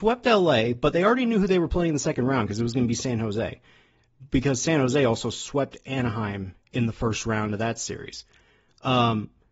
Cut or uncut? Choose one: uncut